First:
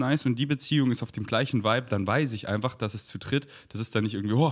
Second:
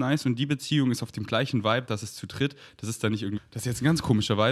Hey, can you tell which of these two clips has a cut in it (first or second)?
second